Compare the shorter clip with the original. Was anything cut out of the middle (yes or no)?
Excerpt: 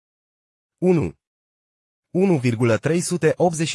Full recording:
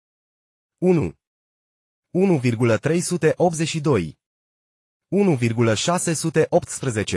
no